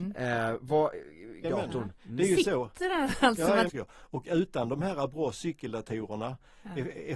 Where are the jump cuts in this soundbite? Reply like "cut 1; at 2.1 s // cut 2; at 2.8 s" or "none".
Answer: cut 1; at 1.4 s // cut 2; at 3.7 s